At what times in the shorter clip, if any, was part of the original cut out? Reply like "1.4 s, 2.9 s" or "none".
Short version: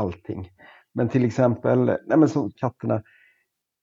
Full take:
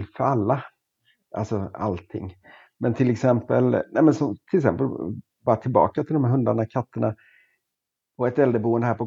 2.5 s